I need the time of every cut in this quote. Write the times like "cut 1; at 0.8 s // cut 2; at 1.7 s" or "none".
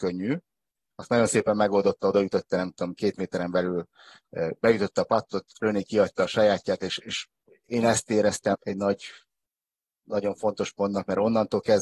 cut 1; at 8.5 s